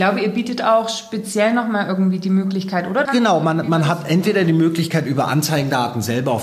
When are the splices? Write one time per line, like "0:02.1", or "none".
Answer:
0:03.1